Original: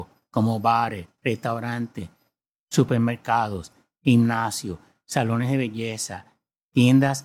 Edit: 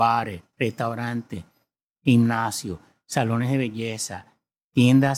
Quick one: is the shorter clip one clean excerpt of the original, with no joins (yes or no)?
no